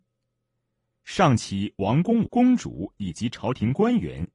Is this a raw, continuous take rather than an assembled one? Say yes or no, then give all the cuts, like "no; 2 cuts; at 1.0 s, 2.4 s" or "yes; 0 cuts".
no; 1 cut; at 2.3 s